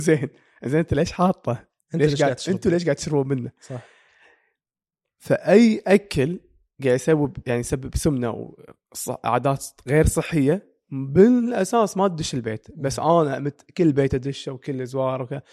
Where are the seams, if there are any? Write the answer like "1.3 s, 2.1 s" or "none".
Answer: none

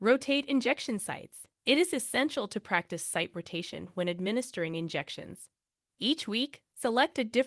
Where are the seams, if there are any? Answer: 1.5 s

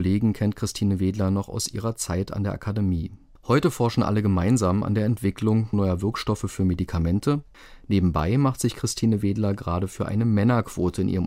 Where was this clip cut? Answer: none

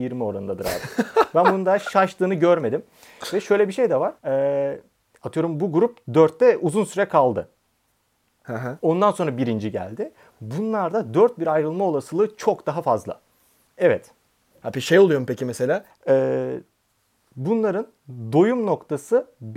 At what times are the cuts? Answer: 4.2 s, 13.7 s, 15.9 s

